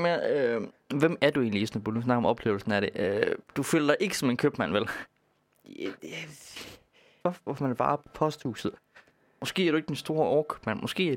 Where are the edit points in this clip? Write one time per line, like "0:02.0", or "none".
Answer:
0:07.2